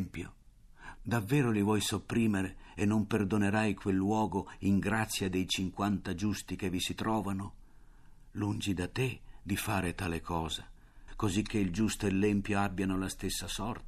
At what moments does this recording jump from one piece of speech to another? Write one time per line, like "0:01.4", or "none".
0:01.0
0:11.1